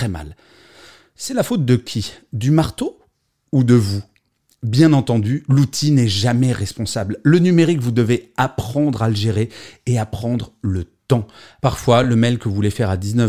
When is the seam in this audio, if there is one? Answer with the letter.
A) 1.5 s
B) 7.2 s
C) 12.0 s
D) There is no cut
D